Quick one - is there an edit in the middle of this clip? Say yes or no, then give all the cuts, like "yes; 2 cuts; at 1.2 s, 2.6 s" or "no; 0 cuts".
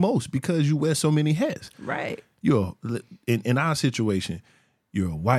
no; 0 cuts